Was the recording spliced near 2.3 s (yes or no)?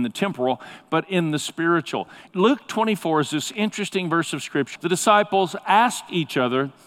yes